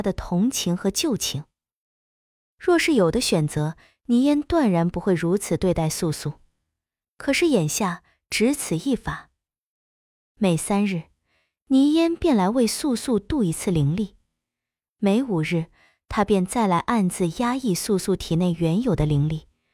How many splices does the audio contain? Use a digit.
0